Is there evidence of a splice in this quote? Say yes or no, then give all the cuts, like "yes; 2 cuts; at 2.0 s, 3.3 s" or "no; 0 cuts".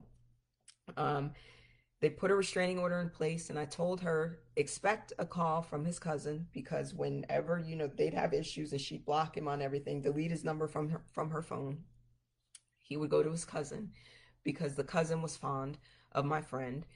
no; 0 cuts